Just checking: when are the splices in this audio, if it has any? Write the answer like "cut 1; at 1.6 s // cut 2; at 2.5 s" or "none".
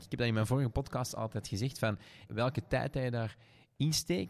cut 1; at 2.3 s